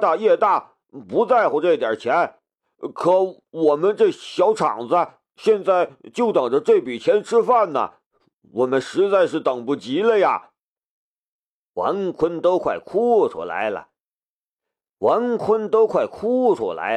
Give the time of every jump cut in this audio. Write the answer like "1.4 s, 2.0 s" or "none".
none